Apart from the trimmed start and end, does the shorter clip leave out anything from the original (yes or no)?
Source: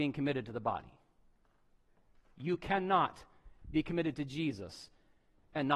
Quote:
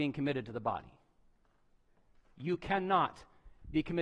no